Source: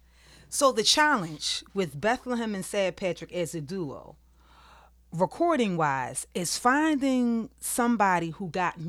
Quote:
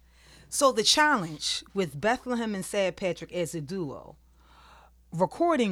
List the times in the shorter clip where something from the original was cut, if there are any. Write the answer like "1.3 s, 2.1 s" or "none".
none